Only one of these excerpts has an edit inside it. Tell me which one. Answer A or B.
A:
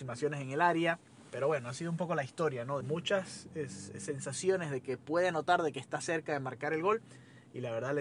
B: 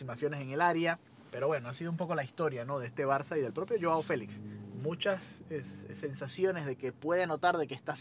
A